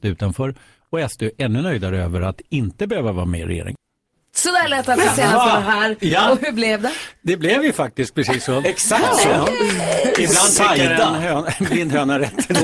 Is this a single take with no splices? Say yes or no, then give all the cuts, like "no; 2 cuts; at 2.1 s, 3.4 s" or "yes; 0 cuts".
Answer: yes; 0 cuts